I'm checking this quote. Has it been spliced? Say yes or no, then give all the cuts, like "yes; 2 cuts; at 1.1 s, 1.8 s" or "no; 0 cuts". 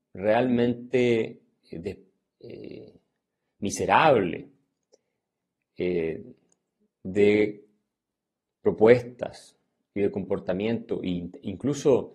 no; 0 cuts